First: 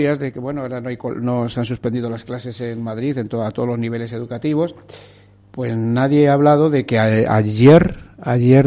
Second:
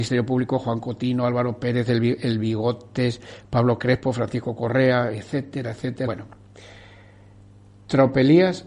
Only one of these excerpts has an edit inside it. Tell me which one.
second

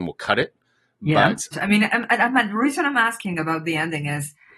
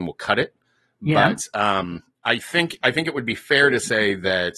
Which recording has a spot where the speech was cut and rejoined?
first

